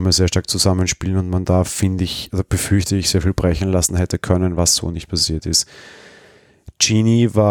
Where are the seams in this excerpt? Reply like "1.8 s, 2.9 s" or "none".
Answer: none

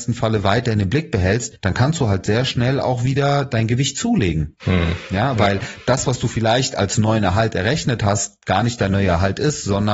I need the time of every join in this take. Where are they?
none

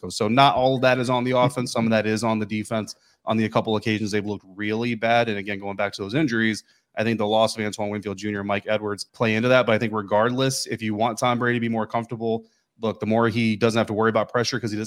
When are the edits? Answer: 9.1 s

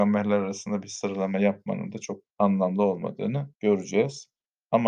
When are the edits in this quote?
2.3 s, 3.5 s

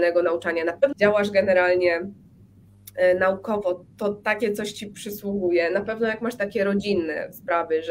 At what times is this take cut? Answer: 0.9 s

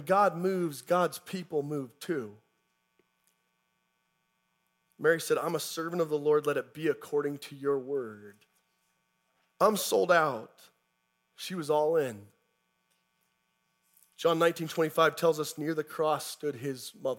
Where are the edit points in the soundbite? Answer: 9.5 s, 11.3 s

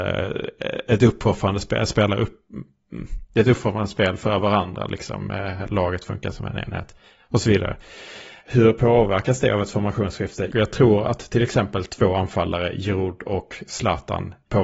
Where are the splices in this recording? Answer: 8.4 s, 10.5 s

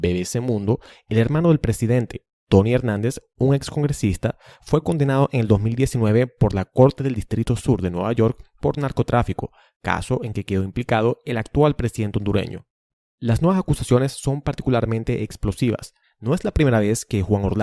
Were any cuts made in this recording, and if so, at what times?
16.0 s

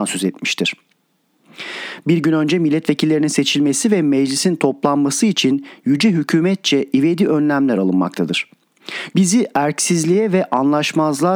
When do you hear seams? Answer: 2.0 s, 9.1 s

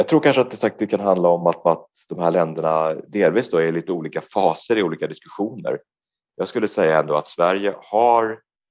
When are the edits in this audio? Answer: none

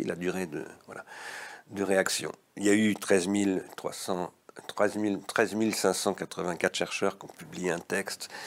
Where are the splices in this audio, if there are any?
none

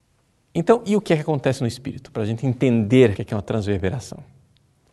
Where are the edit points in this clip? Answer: 3.1 s

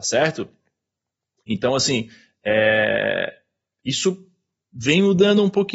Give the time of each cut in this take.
none

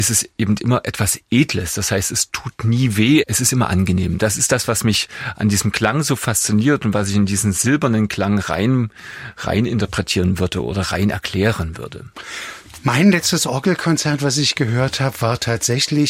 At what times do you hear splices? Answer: 3.2 s

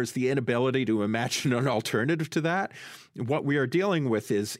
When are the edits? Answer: none

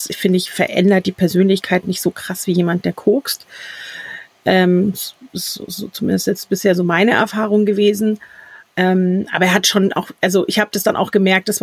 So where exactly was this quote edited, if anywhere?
none

